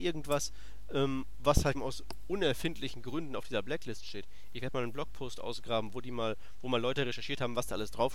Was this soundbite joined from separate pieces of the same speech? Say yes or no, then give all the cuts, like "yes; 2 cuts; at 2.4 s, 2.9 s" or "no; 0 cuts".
yes; 1 cut; at 1.7 s